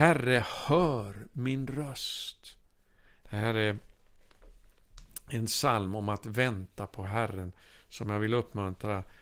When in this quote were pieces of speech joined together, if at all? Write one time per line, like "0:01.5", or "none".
0:03.2